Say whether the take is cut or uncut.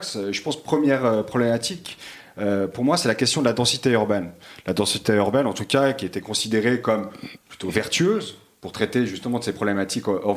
uncut